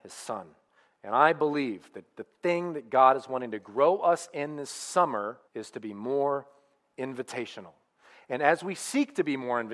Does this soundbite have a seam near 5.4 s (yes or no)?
yes